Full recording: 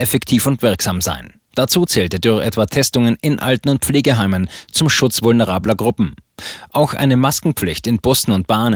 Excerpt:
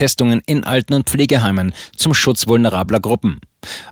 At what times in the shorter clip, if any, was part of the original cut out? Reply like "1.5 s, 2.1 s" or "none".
none